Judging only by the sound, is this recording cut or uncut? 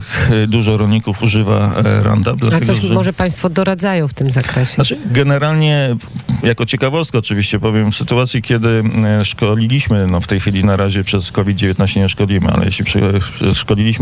uncut